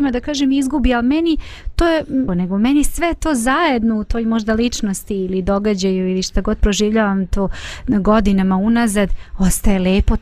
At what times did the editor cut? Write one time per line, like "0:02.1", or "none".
0:02.3